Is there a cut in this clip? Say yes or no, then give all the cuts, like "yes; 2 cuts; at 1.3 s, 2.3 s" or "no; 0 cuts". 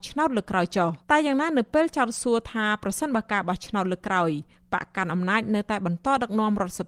yes; 1 cut; at 1.0 s